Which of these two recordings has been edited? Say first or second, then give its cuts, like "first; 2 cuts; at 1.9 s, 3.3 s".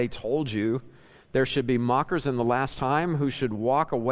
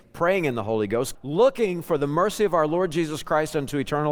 second; 1 cut; at 1.1 s